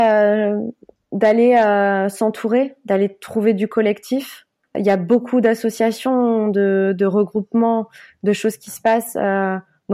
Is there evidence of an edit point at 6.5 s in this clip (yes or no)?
no